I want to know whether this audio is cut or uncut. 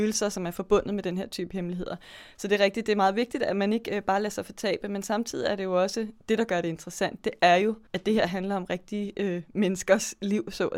cut